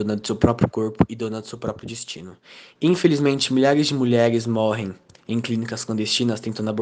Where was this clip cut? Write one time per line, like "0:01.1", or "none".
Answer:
0:02.8